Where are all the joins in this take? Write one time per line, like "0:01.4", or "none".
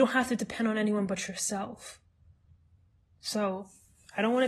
none

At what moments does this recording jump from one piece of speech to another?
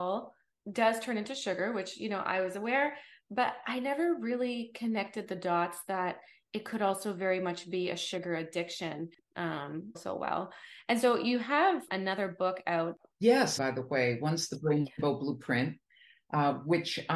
0:09.9
0:13.6

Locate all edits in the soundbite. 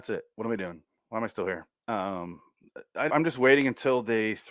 0:01.8
0:03.1

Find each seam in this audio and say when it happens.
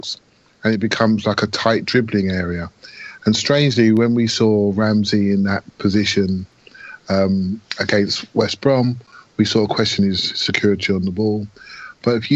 none

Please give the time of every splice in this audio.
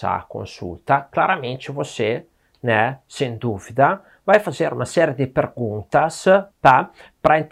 0:06.5

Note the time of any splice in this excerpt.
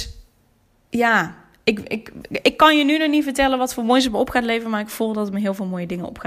none

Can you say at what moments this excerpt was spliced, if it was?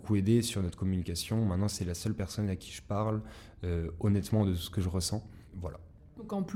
none

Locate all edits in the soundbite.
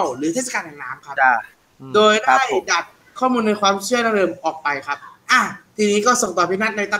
none

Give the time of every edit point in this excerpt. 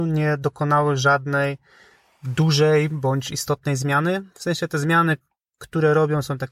none

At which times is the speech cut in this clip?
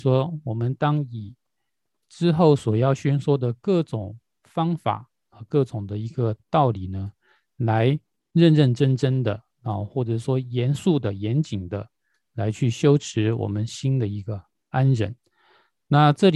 0:09.5

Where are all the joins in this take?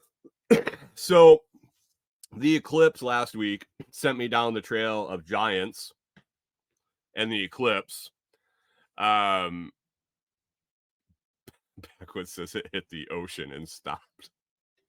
none

